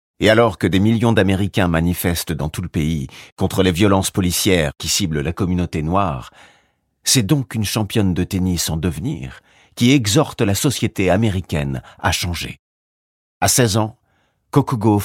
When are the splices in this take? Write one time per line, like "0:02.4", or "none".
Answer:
none